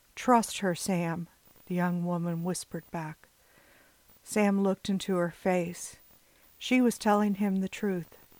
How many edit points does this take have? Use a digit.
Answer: 2